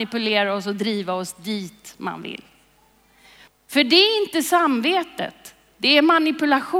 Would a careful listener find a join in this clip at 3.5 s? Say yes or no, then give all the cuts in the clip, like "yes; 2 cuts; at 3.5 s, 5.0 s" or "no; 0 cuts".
yes; 1 cut; at 3.5 s